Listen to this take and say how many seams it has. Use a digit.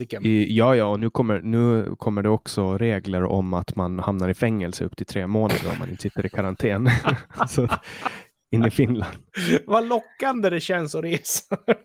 1